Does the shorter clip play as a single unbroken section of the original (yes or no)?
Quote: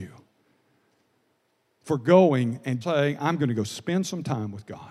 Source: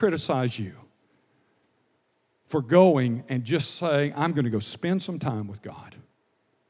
no